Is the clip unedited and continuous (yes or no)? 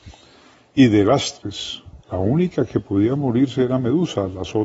no